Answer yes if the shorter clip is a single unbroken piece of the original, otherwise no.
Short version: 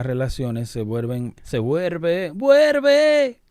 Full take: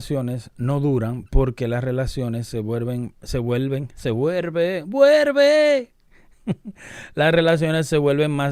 no